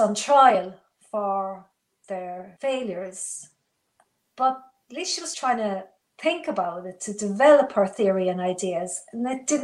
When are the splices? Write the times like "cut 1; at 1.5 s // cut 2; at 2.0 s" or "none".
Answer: cut 1; at 4.2 s // cut 2; at 5.3 s